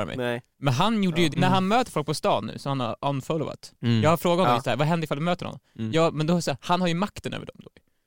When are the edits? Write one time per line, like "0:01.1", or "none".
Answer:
0:01.3